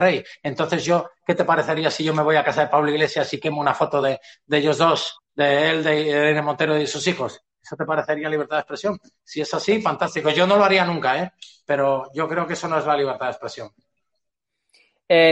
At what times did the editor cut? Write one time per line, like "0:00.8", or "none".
none